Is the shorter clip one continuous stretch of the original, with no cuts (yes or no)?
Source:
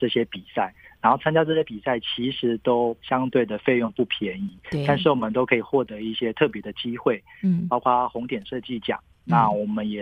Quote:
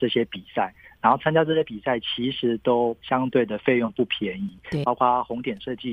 no